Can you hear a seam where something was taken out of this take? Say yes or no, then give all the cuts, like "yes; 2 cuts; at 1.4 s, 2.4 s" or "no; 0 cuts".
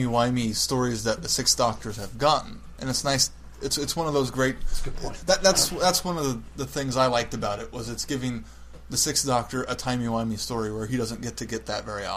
no; 0 cuts